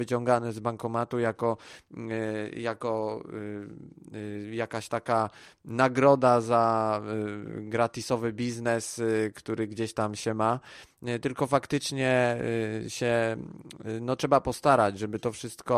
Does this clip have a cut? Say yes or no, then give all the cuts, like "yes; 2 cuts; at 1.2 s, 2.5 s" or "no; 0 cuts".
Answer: no; 0 cuts